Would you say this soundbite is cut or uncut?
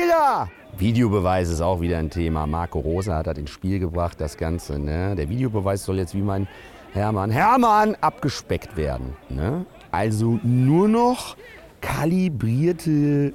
cut